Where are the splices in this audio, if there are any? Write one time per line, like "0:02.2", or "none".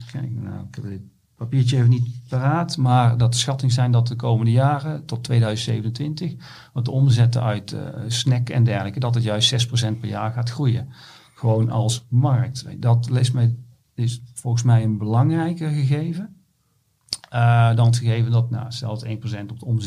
none